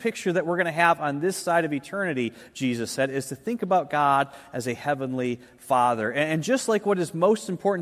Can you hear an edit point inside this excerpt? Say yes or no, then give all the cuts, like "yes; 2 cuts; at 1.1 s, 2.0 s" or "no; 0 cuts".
no; 0 cuts